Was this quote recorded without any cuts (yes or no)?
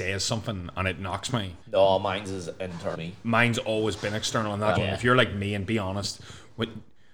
no